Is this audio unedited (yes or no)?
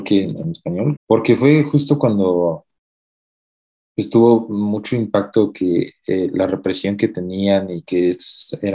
no